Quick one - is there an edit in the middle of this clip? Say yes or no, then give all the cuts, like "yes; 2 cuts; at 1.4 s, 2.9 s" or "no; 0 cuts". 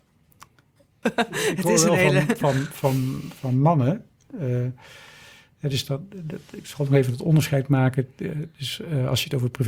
yes; 1 cut; at 1.0 s